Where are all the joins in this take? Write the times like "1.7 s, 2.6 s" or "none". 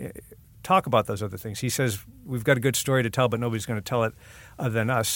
none

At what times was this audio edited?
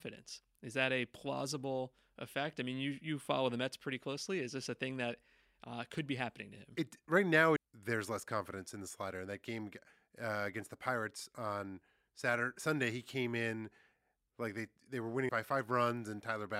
7.6 s, 15.3 s

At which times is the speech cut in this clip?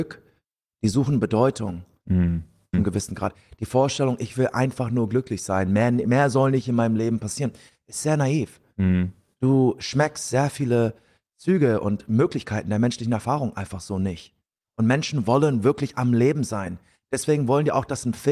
2.7 s

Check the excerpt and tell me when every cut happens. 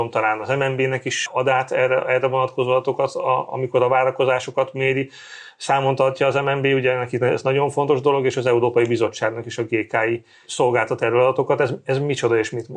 none

